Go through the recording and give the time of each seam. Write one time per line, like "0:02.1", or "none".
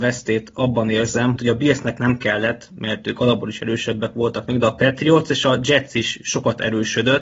0:01.4

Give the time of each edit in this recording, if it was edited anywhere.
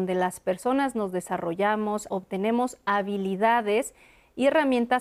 0:02.1

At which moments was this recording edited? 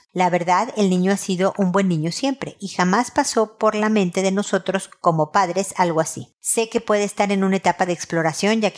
none

